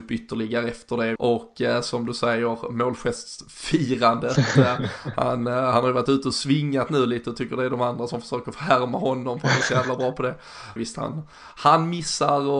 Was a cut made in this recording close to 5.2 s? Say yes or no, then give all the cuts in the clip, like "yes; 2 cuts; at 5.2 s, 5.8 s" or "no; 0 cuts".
no; 2 cuts; at 1.2 s, 10.8 s